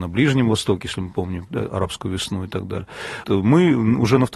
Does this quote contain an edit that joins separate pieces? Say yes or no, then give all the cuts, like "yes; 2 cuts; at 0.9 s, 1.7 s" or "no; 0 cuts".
yes; 1 cut; at 3.2 s